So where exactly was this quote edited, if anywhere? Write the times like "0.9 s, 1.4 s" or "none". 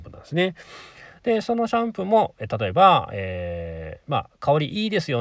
none